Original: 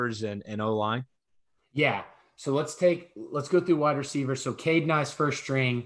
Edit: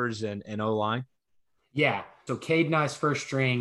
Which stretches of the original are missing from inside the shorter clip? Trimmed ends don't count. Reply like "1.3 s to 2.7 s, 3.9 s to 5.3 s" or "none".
2.3 s to 4.4 s

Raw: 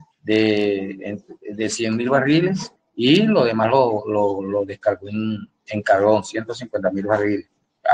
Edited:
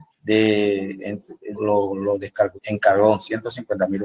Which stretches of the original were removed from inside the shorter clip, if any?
1.5 s to 4.0 s, 5.0 s to 5.6 s

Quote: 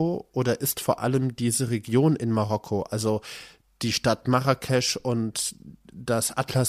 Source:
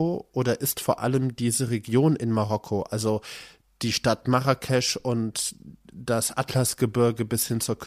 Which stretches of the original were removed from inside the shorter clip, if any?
none

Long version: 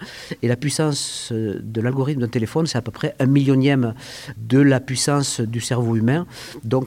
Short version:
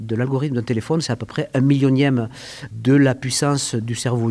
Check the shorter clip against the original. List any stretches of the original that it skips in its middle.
none

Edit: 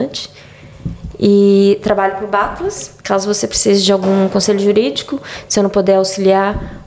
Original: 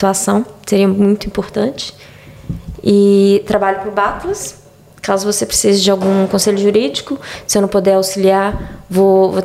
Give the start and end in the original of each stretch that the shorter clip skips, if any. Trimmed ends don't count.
4.6 s to 5.0 s

